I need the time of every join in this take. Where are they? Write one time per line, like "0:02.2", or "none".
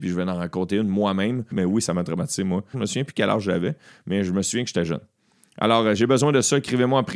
0:01.5
0:02.7